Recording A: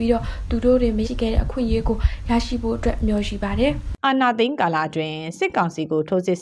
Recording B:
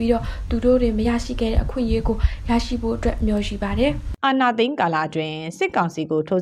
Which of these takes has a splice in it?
A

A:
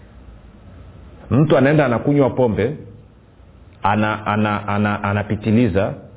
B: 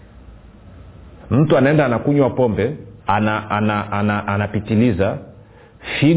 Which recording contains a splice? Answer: B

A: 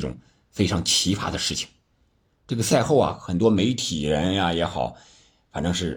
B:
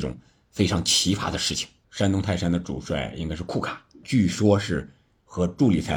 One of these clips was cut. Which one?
B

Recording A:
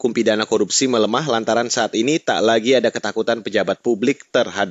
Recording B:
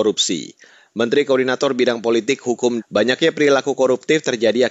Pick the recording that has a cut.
B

